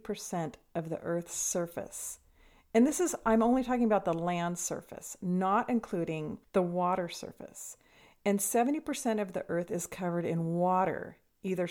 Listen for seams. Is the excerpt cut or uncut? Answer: uncut